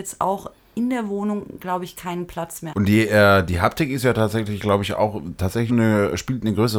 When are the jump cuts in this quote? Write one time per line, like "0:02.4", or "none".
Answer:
0:02.7
0:05.7